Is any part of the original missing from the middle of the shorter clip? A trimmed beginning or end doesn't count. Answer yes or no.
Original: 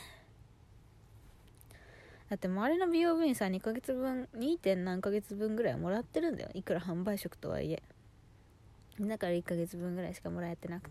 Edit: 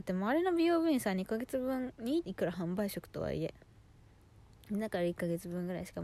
yes